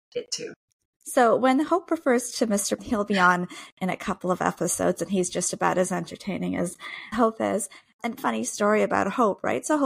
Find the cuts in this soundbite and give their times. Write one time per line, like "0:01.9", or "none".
0:02.8